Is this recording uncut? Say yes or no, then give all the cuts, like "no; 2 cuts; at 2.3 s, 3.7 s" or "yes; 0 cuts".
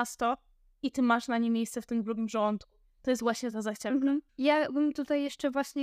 no; 1 cut; at 4.3 s